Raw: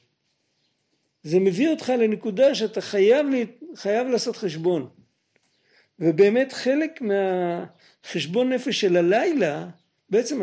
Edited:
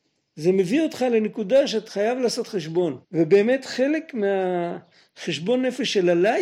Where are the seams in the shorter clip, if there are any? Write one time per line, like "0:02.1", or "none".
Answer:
0:01.9
0:03.0